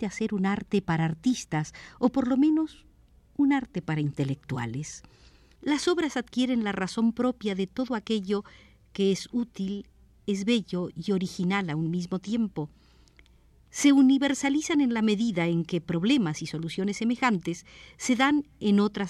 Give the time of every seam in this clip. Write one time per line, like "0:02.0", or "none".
0:05.6